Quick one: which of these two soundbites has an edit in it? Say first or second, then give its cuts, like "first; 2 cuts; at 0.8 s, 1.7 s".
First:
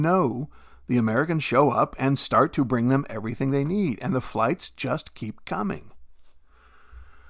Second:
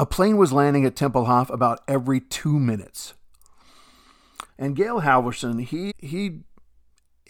second; 2 cuts; at 4.5 s, 5.9 s